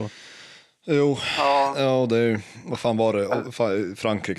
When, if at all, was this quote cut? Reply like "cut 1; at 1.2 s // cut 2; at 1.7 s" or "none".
none